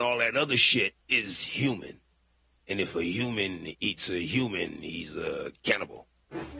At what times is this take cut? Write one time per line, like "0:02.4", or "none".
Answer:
0:01.0